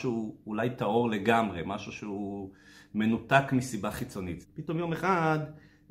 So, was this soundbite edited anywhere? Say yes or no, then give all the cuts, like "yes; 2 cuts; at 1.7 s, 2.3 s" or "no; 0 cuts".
yes; 1 cut; at 4.4 s